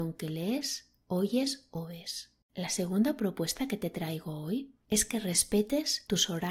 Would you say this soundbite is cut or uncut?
cut